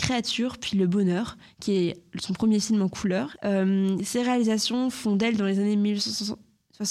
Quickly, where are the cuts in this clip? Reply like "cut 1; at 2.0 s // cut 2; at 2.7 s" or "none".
cut 1; at 3.3 s